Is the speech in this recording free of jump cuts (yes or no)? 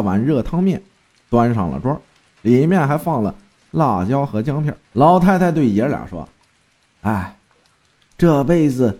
no